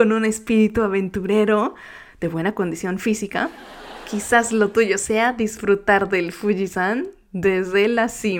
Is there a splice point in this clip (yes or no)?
no